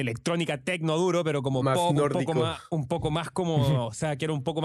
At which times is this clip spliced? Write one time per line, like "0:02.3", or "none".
none

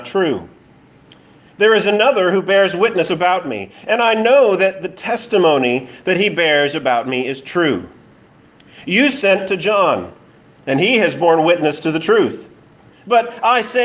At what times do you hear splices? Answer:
0:12.9

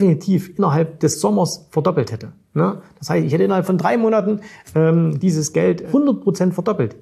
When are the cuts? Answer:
none

